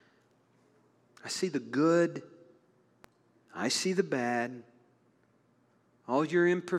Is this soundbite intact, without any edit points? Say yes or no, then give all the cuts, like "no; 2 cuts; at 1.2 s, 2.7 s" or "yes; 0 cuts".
yes; 0 cuts